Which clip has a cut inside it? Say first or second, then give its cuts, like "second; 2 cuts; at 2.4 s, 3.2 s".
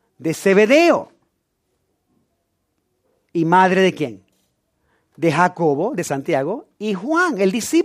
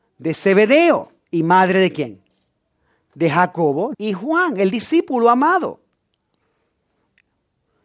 second; 2 cuts; at 1.2 s, 3.9 s